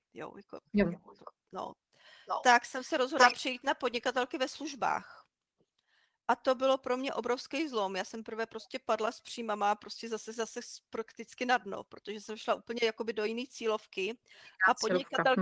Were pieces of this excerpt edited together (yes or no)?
no